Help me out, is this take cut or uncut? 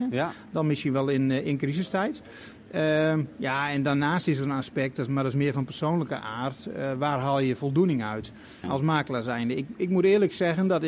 cut